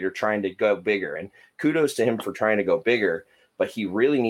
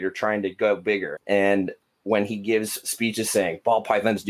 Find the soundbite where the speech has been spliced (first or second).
second